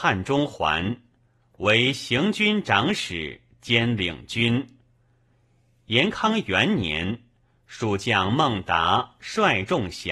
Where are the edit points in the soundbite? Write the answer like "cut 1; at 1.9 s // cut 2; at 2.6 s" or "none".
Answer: none